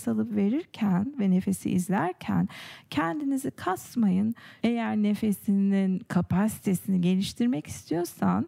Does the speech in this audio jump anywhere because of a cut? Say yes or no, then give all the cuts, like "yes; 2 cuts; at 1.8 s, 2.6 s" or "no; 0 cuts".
yes; 1 cut; at 4.6 s